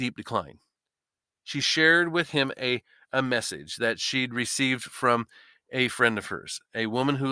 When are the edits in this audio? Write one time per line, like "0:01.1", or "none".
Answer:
none